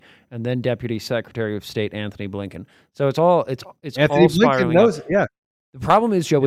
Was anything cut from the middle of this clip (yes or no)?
no